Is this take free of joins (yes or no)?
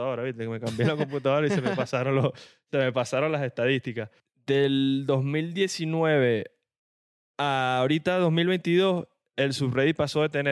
yes